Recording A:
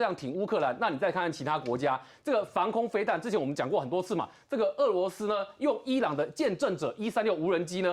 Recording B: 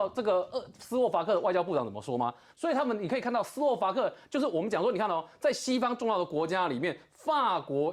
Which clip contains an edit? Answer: B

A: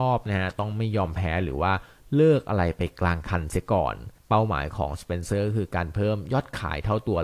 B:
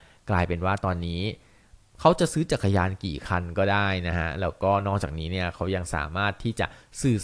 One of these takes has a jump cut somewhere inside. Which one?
A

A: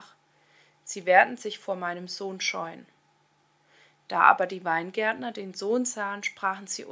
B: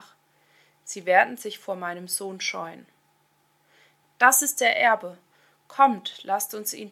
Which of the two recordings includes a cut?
B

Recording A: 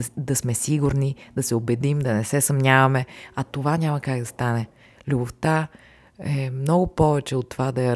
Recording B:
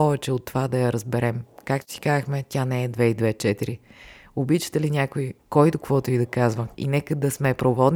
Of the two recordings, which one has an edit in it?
B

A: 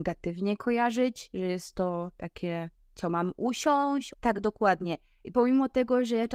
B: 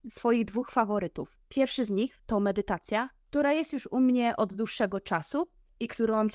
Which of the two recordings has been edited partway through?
A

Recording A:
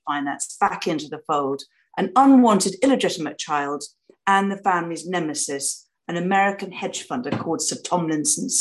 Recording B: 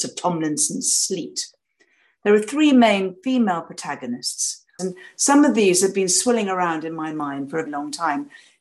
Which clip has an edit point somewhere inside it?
B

